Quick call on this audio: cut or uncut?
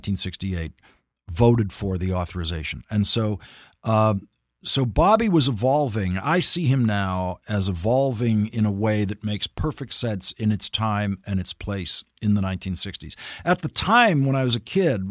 uncut